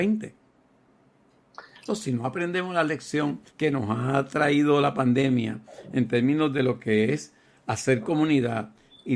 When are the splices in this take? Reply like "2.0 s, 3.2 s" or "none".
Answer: 1.9 s, 3.5 s